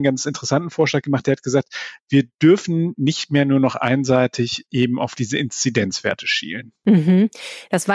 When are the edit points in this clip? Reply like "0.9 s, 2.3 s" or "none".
none